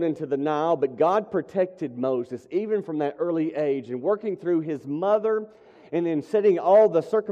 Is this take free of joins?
yes; 0 cuts

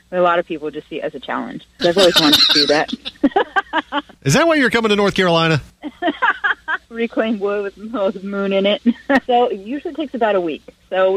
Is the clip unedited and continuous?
no; 3 cuts; at 1.8 s, 7.7 s, 9.3 s

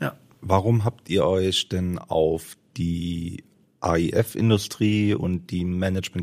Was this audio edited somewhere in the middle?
no; 0 cuts

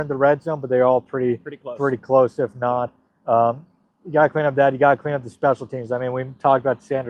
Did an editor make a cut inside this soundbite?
no; 0 cuts

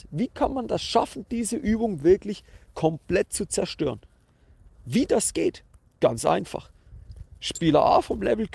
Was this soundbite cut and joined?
no; 0 cuts

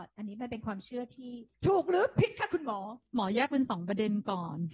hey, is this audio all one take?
no; 2 cuts; at 1.5 s, 3.0 s

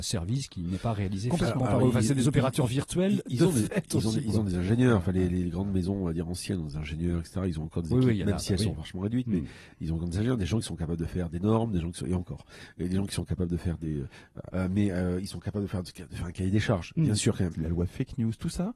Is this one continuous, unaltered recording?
no; 2 cuts; at 14.5 s, 17.5 s

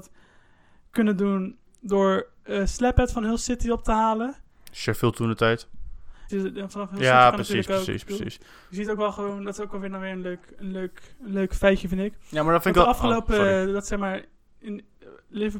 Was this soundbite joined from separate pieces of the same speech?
yes; 1 cut; at 6.3 s

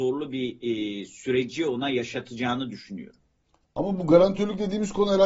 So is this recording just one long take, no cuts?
yes; 0 cuts

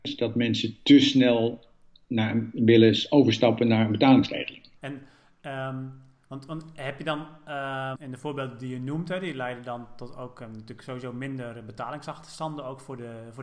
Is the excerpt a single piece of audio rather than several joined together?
no; 2 cuts; at 4.8 s, 8.0 s

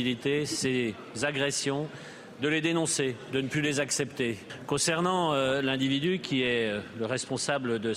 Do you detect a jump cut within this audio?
no; 0 cuts

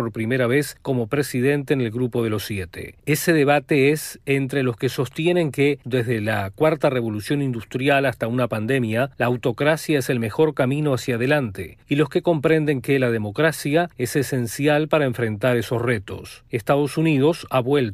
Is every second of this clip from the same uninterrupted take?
no; 1 cut; at 5.8 s

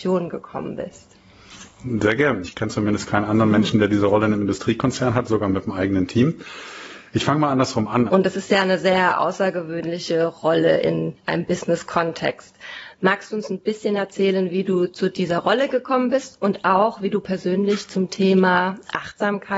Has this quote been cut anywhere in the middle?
yes; 2 cuts; at 2.4 s, 8.1 s

